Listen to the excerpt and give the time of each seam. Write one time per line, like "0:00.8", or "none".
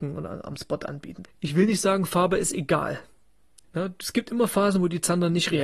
0:01.2
0:03.6